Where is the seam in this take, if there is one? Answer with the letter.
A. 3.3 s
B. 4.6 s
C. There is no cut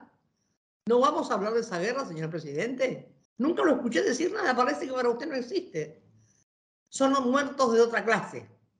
A